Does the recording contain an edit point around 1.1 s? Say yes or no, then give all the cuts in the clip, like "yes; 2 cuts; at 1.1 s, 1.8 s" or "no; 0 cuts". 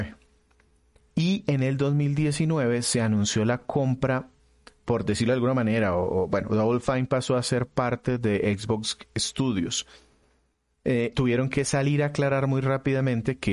no; 1 cut; at 11.1 s